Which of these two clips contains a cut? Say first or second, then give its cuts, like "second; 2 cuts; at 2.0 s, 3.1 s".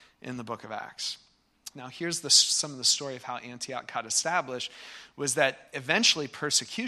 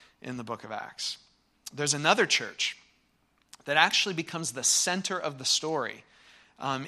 first; 1 cut; at 1.7 s